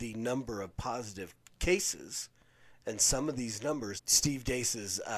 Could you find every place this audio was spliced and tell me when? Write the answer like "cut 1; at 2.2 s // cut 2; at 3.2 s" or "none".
cut 1; at 2.8 s // cut 2; at 4.0 s